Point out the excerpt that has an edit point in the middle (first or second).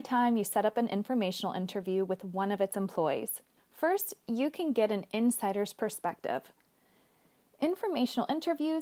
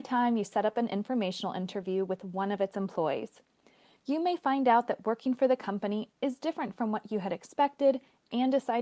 first